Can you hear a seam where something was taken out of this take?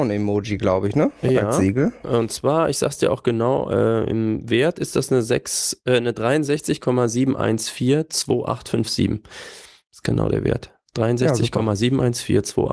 no; 0 cuts

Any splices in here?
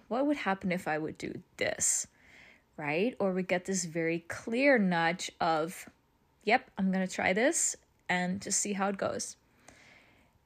no; 0 cuts

